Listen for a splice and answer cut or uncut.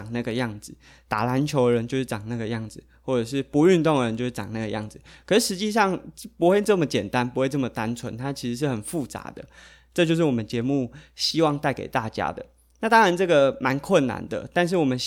uncut